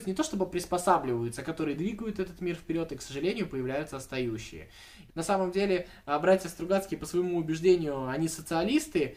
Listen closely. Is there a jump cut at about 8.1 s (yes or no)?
no